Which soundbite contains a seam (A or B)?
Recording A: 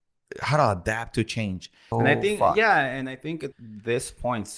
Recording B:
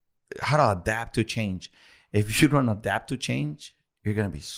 A